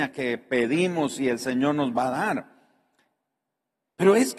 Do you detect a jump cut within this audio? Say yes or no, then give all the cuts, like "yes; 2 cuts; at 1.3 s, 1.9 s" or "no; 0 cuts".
no; 0 cuts